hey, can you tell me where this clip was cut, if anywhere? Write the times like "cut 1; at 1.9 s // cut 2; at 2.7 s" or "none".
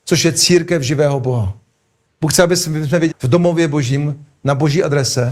cut 1; at 2.1 s // cut 2; at 3.1 s